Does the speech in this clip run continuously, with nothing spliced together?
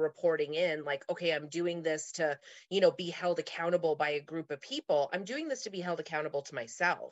yes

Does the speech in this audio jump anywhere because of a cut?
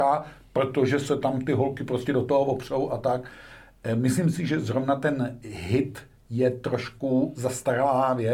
no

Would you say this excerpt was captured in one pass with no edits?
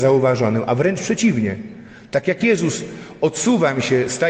yes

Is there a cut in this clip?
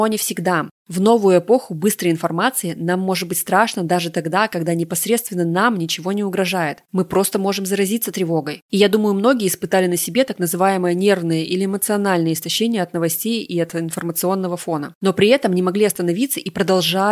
no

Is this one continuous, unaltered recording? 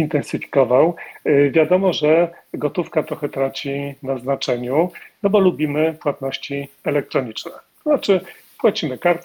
yes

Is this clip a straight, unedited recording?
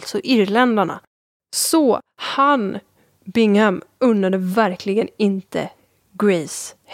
yes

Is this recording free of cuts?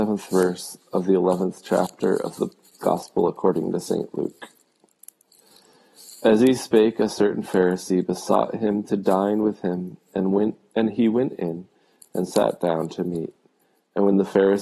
yes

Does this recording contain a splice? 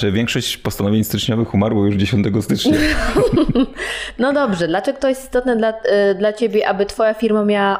no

